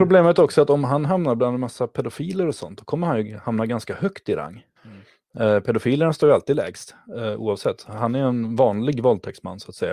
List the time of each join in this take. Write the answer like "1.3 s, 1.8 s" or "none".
4.8 s